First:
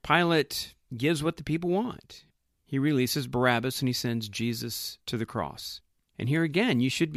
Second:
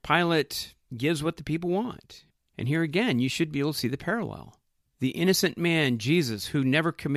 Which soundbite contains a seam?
second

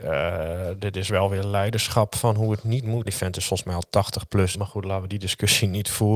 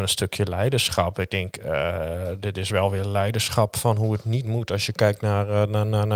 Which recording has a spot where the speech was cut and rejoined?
first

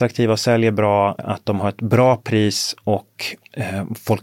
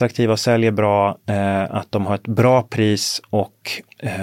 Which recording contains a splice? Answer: first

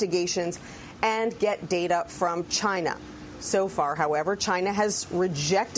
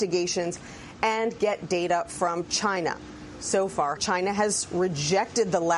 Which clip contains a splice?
second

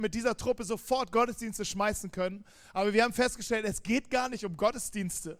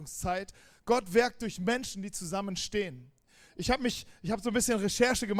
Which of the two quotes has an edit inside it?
second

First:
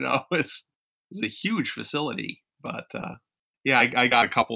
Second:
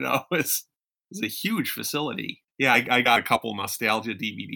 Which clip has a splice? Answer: second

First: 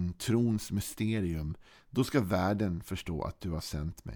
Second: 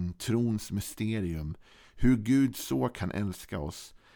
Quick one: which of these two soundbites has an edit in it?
first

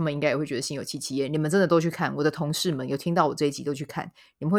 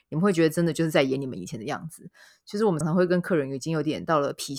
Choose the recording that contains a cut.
second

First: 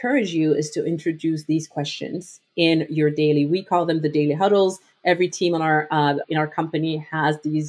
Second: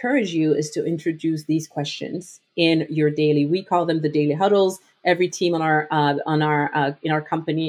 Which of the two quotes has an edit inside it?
first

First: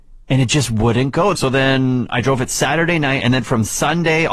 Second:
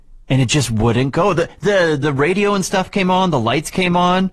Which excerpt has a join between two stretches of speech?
first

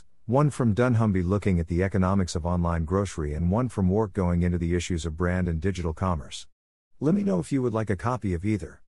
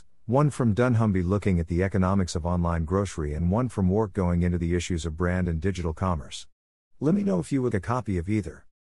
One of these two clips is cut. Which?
second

